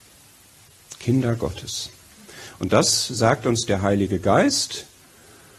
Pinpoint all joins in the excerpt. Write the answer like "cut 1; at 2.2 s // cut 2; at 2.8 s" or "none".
none

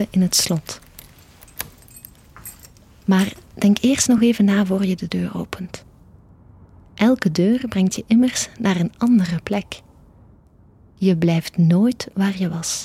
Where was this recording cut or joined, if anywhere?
none

